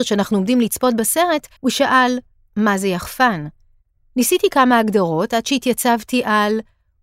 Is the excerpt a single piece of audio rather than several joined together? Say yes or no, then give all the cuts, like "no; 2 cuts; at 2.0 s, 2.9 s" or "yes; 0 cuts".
no; 1 cut; at 1.6 s